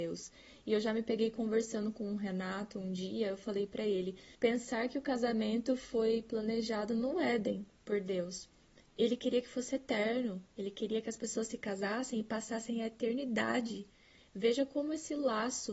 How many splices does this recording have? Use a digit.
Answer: 1